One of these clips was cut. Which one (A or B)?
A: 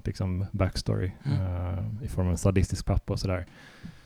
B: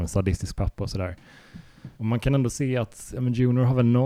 B